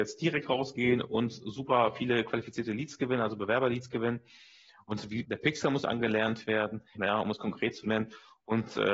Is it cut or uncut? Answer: cut